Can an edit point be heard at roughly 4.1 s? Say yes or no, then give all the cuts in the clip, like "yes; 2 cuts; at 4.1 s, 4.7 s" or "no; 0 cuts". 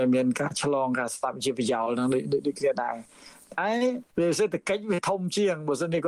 yes; 1 cut; at 4.1 s